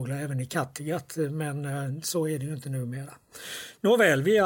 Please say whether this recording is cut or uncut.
uncut